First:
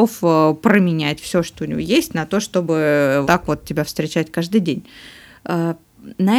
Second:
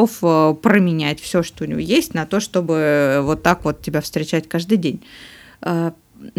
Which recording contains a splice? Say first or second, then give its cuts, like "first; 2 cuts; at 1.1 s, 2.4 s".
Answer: first; 1 cut; at 3.2 s